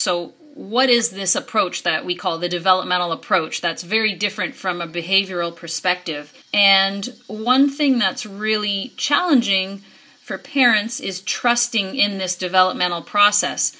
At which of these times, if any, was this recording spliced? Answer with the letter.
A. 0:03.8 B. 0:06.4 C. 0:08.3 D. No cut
B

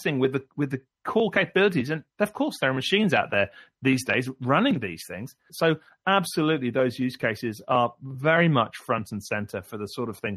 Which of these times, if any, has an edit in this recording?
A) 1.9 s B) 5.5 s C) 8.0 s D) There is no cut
B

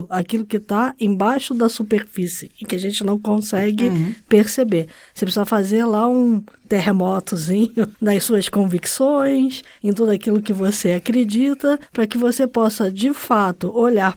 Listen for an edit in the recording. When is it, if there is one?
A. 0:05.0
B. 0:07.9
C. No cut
B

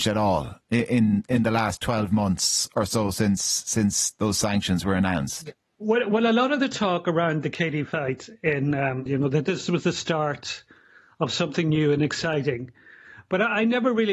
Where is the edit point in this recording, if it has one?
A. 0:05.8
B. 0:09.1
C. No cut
B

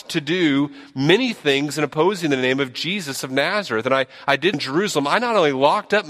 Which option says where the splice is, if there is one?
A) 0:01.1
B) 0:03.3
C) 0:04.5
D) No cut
C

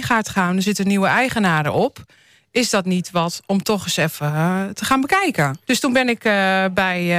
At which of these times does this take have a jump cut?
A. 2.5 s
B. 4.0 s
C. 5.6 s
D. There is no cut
C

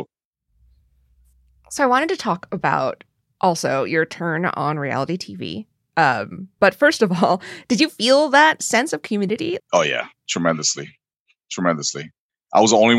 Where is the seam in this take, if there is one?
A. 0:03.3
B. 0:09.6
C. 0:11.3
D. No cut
B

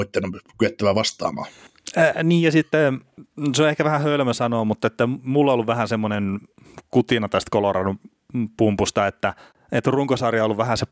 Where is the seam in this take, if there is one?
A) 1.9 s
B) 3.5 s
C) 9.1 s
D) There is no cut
D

